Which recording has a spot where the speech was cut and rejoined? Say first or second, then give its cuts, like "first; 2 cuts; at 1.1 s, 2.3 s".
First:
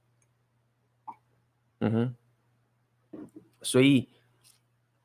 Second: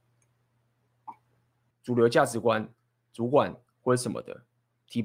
second; 1 cut; at 1.7 s